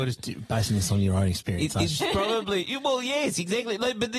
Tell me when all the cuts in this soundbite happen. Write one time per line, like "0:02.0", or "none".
0:02.0